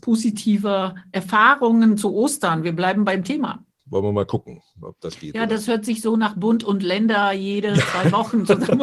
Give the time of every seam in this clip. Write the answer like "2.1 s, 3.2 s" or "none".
3.8 s